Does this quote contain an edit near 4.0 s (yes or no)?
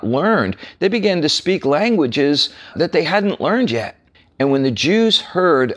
no